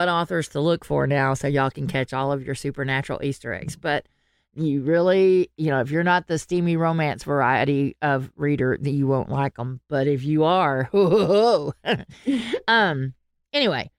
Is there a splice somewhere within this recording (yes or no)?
no